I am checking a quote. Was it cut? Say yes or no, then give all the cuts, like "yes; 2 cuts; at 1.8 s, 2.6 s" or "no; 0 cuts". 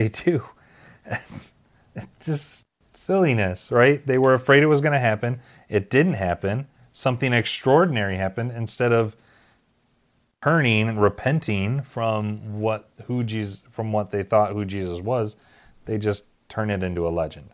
no; 0 cuts